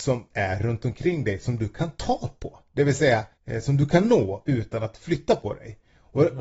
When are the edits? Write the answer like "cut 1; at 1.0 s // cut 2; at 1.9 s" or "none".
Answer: cut 1; at 3.3 s